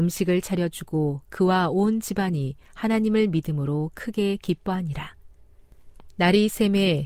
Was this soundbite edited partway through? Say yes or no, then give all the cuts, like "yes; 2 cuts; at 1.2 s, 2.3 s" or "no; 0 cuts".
no; 0 cuts